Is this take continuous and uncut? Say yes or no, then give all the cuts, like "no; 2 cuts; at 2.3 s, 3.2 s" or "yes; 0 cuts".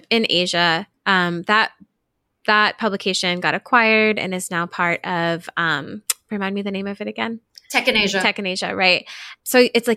yes; 0 cuts